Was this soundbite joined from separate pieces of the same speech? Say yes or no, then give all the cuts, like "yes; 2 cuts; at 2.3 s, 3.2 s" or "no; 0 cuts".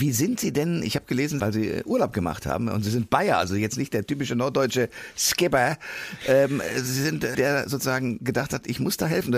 yes; 2 cuts; at 1.4 s, 7.3 s